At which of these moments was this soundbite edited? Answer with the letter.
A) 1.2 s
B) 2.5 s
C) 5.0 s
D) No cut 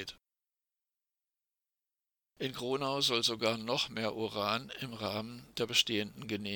D